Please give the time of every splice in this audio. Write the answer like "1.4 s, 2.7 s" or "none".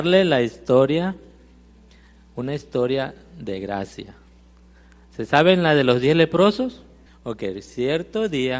7.1 s